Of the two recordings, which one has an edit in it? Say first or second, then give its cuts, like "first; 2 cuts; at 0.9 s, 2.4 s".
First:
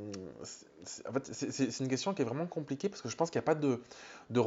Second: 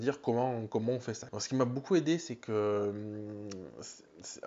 second; 1 cut; at 1.3 s